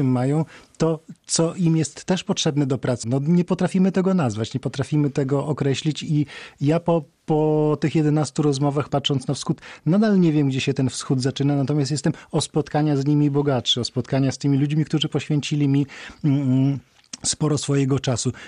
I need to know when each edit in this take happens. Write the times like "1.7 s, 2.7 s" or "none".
3.0 s, 8.9 s